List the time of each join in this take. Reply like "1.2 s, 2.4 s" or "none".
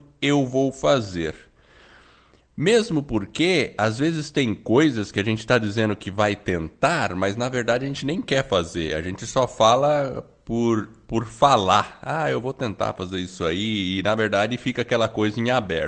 none